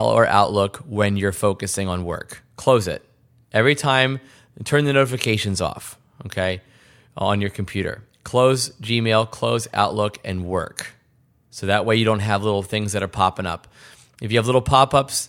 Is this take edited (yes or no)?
no